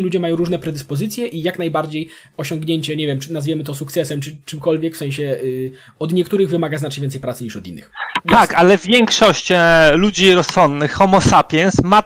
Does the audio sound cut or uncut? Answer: uncut